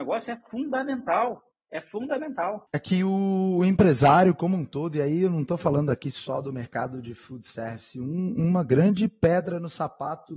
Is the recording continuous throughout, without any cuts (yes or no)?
yes